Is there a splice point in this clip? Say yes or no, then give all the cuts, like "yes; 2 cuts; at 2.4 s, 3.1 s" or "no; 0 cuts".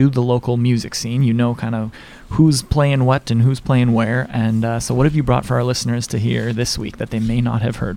no; 0 cuts